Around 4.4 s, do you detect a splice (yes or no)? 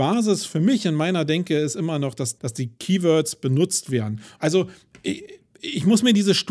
yes